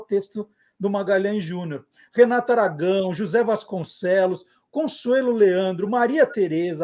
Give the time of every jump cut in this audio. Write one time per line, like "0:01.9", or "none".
none